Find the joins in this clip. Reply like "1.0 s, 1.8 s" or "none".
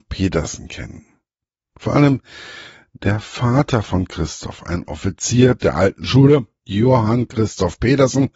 none

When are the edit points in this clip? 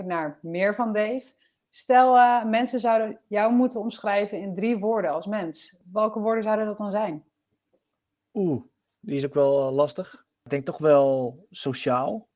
none

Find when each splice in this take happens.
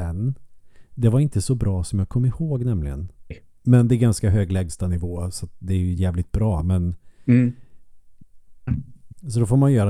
3.3 s, 8.7 s

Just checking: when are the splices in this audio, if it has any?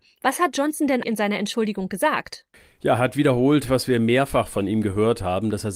1.0 s

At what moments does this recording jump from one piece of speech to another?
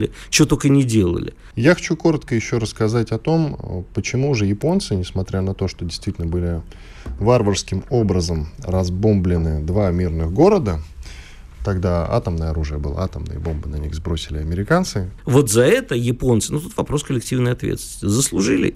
1.5 s, 15.2 s

